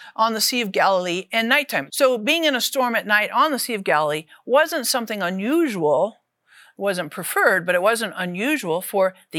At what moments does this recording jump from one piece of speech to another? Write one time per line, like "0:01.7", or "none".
0:01.9